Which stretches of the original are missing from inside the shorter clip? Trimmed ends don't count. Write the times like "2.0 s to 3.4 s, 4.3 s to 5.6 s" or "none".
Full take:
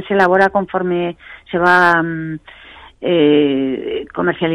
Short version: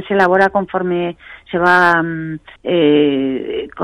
2.6 s to 2.9 s

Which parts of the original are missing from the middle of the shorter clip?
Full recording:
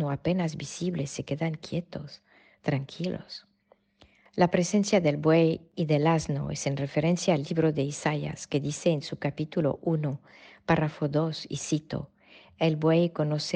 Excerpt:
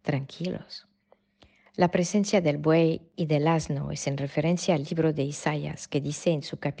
none

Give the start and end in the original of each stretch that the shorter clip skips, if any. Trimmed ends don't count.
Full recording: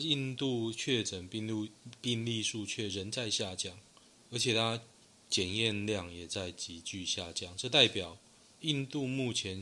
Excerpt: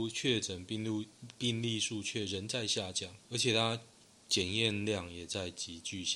3.8 s to 4.2 s

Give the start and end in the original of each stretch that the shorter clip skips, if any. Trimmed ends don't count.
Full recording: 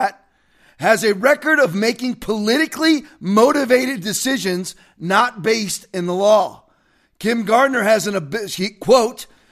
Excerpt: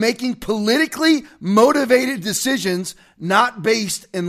none

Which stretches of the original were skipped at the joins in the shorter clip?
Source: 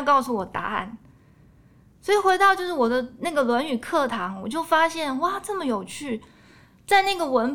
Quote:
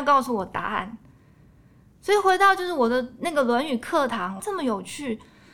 4.4 s to 5.4 s

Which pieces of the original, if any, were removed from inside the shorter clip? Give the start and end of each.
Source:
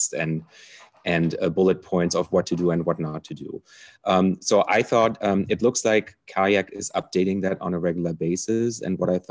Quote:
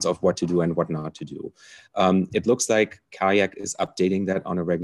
4.4 s to 5.5 s

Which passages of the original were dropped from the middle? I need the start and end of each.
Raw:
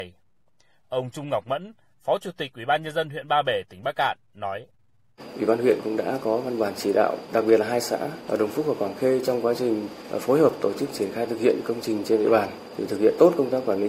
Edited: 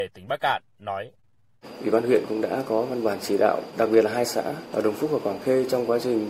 none

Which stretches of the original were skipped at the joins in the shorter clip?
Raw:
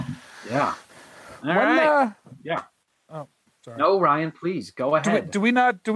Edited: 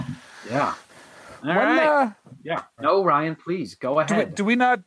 2.8 s to 3.7 s

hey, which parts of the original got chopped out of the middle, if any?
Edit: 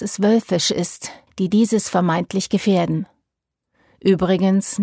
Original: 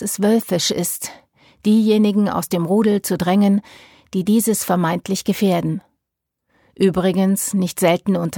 1.3 s to 4.0 s

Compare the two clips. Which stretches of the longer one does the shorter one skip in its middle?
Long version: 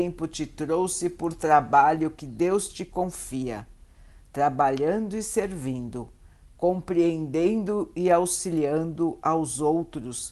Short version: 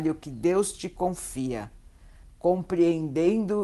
4.2 s to 6.4 s

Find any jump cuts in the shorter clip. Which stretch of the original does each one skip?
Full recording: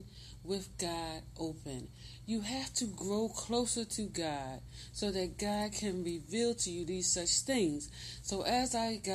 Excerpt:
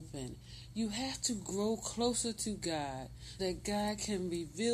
4.9 s to 5.1 s

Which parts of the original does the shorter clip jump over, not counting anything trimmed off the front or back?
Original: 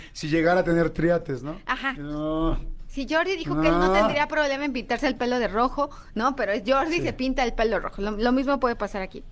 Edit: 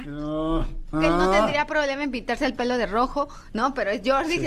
2.8 s to 3.5 s

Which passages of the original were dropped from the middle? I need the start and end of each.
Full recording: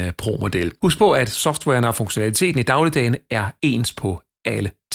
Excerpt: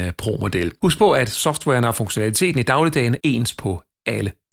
3.2 s to 3.6 s

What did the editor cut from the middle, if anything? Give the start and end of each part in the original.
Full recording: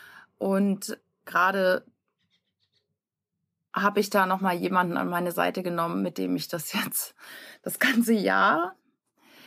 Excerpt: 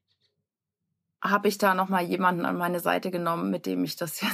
none

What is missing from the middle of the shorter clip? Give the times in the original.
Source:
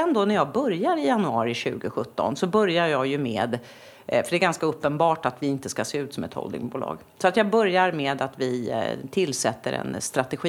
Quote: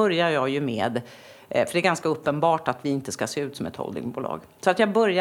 none

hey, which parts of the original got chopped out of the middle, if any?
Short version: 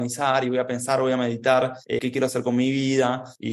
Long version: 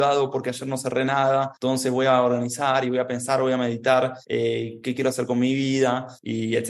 4.4 s to 4.8 s

